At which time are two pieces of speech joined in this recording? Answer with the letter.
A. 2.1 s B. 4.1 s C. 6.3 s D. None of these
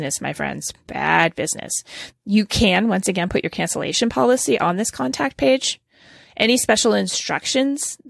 A